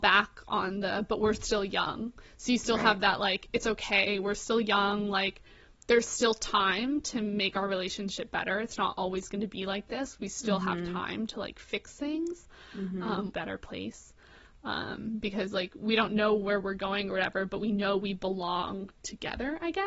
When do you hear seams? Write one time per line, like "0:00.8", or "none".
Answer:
0:13.3